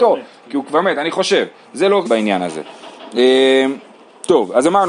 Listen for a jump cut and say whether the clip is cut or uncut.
cut